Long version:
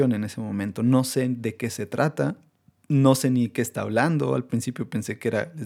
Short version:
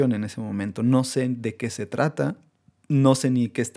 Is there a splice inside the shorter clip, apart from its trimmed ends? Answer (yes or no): no